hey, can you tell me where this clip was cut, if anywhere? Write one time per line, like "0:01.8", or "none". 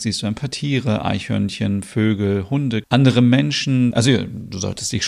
0:02.8
0:03.9